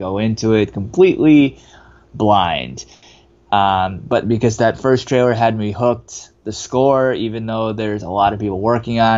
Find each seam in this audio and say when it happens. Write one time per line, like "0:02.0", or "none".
none